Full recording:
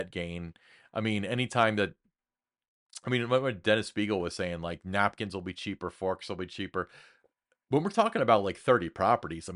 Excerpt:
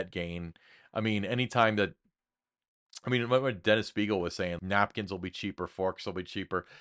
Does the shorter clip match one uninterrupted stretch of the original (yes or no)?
no